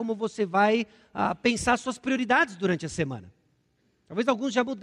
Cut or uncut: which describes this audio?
uncut